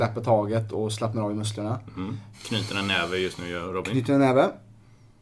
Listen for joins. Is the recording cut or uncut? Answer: cut